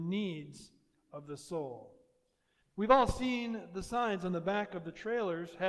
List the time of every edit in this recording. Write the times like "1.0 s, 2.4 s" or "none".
2.6 s